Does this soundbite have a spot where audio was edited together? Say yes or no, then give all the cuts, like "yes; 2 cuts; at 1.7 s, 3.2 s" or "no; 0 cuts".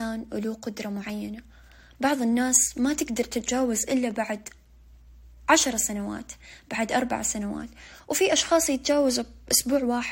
no; 0 cuts